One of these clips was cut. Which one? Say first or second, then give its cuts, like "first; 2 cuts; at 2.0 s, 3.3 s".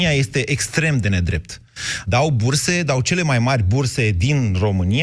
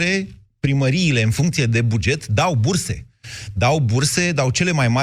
first; 1 cut; at 2.0 s